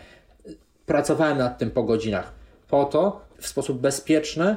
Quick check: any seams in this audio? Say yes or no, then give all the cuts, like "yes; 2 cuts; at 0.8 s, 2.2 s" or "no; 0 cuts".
yes; 1 cut; at 3.3 s